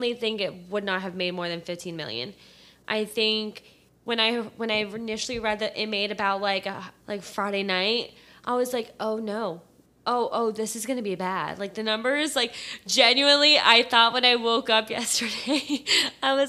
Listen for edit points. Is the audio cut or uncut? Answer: cut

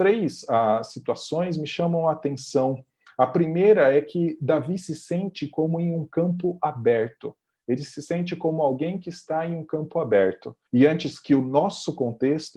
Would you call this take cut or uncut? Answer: cut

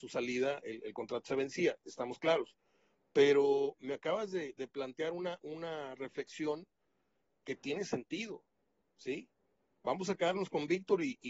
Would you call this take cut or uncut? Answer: uncut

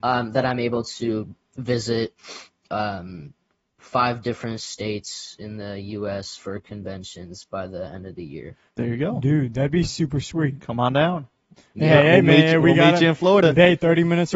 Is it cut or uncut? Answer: uncut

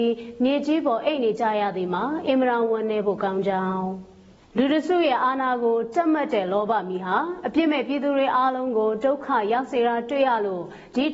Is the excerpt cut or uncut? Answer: uncut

